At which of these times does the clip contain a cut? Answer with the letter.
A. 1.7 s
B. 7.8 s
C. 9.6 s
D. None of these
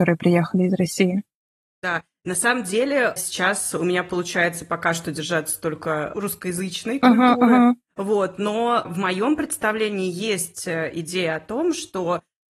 D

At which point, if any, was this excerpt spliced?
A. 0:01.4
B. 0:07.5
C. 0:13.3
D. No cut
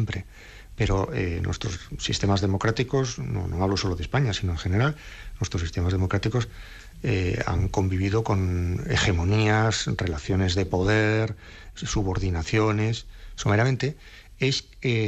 C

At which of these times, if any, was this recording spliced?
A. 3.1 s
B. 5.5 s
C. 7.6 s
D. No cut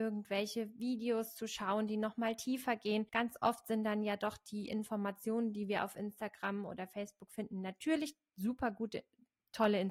A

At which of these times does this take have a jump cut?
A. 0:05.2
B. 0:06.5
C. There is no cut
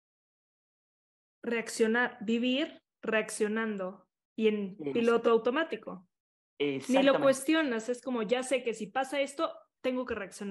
C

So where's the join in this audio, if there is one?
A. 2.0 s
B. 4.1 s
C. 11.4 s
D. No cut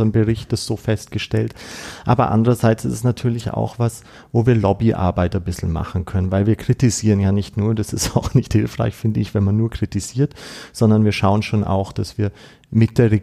D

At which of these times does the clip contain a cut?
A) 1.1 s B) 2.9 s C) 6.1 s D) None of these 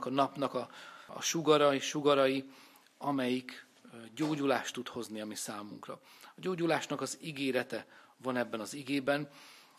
A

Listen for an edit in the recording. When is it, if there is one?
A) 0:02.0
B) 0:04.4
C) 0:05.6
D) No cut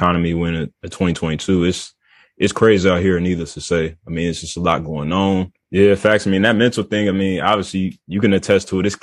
C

